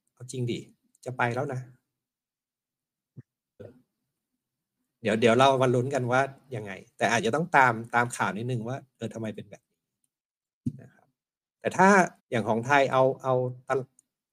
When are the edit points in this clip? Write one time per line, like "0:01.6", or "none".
0:03.6
0:12.2